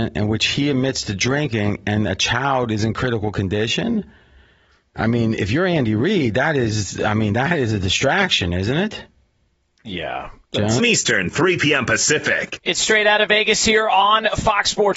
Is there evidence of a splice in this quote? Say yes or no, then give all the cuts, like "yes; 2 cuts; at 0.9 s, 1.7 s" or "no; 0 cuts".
yes; 1 cut; at 10.8 s